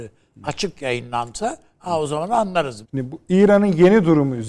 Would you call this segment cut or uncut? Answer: cut